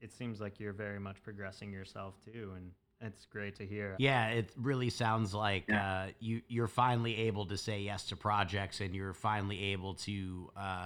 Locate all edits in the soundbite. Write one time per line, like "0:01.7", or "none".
0:03.9